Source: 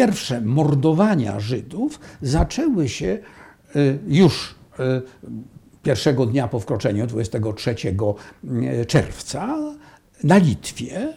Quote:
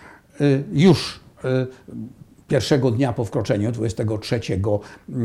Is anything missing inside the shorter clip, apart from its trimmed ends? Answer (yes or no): no